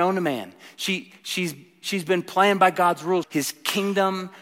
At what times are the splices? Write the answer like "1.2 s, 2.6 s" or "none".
3.2 s